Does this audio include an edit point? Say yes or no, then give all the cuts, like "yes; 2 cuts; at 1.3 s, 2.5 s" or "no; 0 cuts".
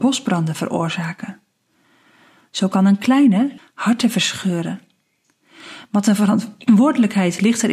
yes; 1 cut; at 3.6 s